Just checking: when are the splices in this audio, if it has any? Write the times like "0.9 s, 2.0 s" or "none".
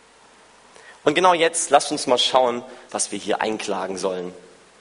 2.9 s